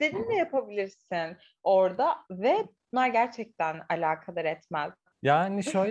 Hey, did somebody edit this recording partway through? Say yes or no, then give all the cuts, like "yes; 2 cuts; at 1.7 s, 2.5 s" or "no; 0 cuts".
no; 0 cuts